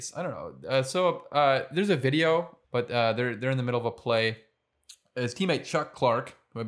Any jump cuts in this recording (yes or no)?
yes